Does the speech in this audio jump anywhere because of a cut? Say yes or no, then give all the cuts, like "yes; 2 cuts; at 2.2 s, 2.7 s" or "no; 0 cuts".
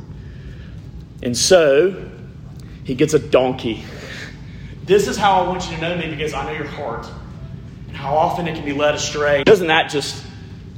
yes; 2 cuts; at 4.8 s, 9.4 s